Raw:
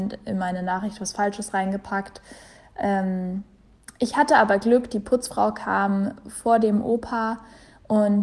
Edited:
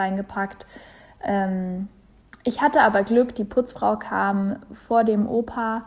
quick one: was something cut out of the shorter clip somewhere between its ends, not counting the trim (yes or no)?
no